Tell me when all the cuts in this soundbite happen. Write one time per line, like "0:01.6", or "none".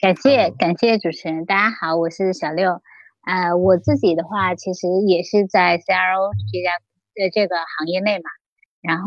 none